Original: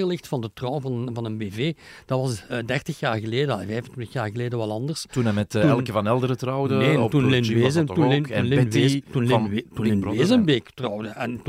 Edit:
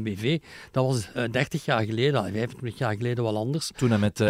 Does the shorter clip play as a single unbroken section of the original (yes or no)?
yes